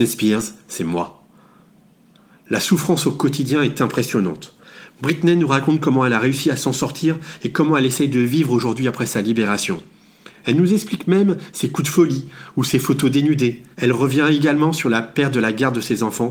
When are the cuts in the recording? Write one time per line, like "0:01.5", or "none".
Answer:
0:13.7